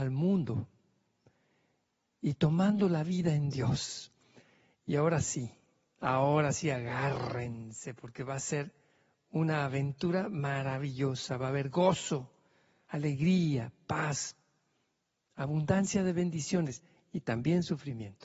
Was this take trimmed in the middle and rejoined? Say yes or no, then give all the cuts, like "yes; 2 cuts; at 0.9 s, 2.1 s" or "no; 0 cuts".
no; 0 cuts